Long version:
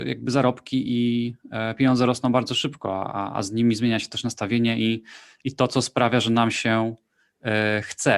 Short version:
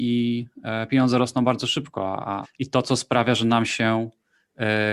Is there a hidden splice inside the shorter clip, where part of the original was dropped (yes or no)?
yes